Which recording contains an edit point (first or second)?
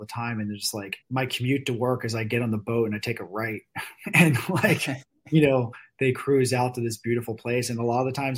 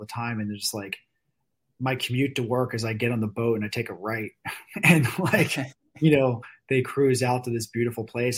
first